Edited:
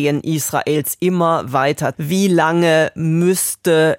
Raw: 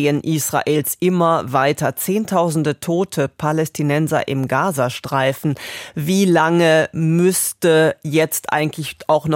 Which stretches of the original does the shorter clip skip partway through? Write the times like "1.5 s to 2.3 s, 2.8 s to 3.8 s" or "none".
1.9 s to 5.9 s